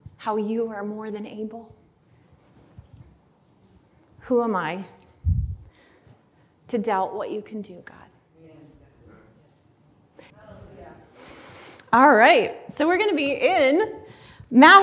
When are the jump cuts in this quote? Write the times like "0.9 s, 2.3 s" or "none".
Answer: 10.3 s

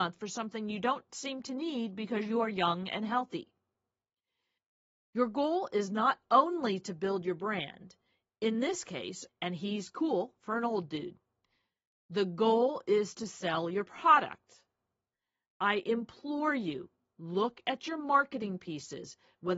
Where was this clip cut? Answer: 9.3 s

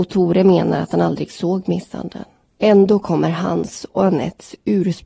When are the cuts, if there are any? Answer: 2.5 s

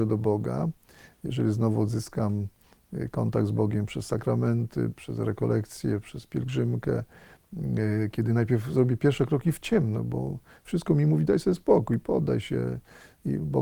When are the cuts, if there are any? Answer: none

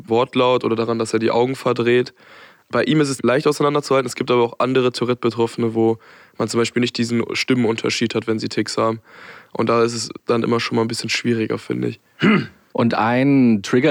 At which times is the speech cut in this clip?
none

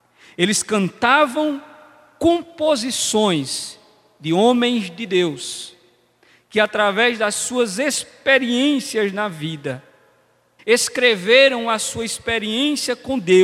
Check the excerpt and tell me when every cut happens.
10.6 s

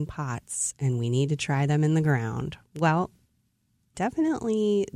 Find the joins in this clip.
3.9 s

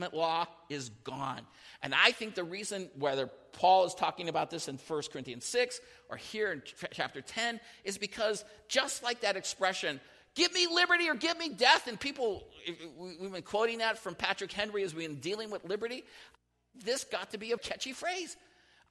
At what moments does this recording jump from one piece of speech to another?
17.6 s

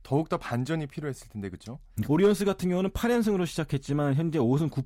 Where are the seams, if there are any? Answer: 2.0 s

